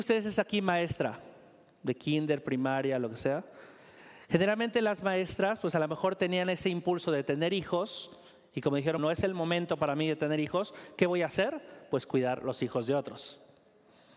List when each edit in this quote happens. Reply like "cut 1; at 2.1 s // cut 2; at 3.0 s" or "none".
cut 1; at 9.0 s